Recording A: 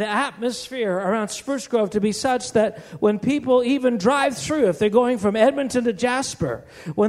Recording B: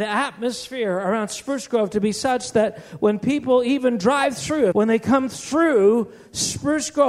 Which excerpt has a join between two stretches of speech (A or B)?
B